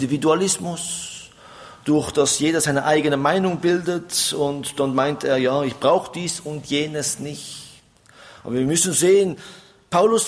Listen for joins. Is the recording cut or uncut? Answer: uncut